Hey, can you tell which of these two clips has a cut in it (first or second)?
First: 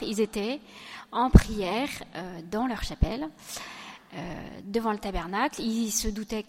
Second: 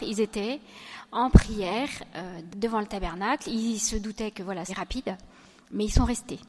second